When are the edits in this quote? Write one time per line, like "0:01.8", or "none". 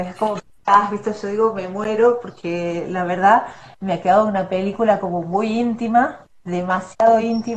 none